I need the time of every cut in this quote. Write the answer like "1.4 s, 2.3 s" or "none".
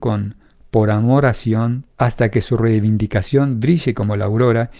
2.0 s